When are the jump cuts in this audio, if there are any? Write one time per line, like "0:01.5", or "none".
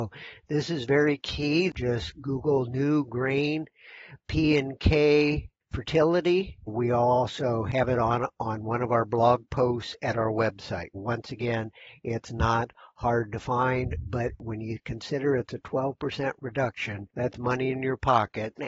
0:01.7
0:06.7
0:10.9